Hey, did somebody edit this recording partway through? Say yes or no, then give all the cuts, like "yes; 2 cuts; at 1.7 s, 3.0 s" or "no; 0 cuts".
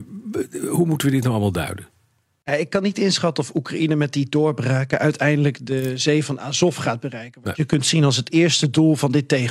no; 0 cuts